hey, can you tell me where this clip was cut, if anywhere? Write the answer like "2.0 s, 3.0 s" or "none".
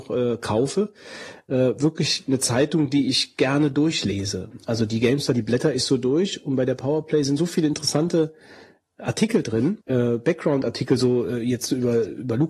9.8 s